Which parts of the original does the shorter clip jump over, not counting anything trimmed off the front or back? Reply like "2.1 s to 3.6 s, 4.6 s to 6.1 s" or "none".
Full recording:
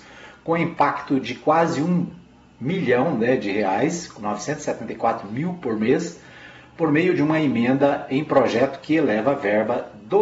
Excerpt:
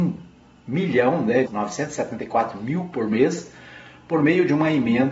3.4 s to 4.1 s